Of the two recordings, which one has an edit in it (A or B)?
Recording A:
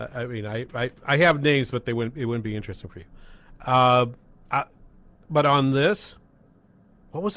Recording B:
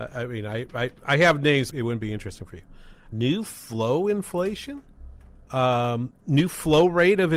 B